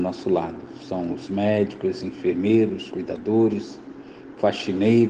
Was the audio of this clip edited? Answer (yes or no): no